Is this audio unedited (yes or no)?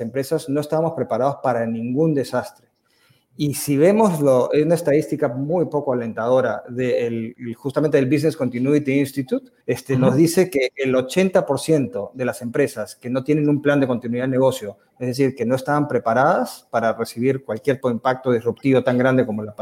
no